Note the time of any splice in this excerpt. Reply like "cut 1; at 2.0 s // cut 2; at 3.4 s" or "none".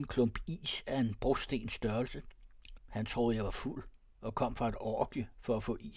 cut 1; at 2.8 s